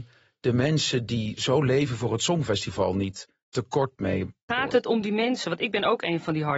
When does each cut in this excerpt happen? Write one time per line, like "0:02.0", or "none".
0:04.5